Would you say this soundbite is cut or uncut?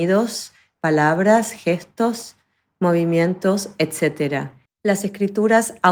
cut